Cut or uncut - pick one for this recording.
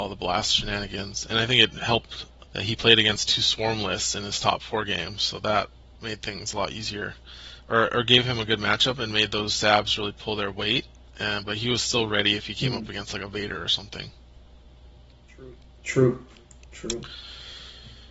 cut